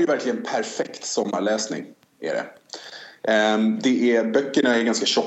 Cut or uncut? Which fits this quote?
uncut